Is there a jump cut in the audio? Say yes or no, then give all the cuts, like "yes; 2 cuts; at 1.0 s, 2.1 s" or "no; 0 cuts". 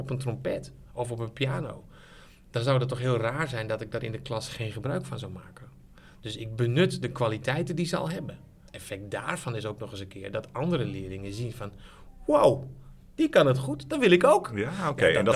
no; 0 cuts